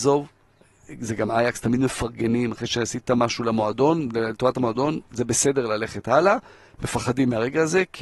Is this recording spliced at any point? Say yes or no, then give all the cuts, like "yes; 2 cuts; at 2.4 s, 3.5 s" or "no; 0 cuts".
no; 0 cuts